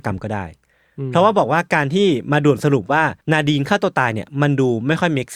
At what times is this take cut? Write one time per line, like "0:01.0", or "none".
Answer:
0:03.2